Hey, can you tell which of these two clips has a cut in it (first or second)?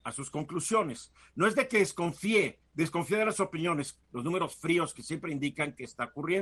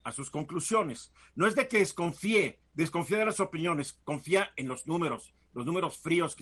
first